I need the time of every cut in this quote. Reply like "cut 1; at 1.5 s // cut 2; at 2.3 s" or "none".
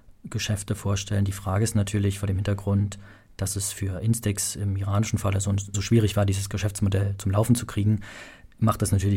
cut 1; at 5.7 s